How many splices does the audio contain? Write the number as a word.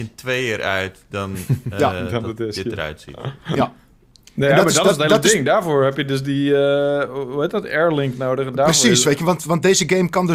zero